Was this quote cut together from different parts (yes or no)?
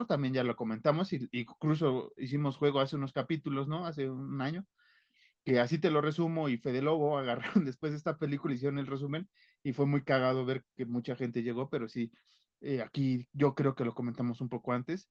no